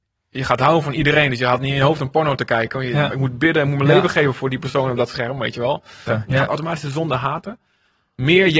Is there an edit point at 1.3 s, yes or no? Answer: no